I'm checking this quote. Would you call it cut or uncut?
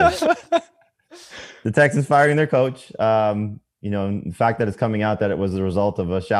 uncut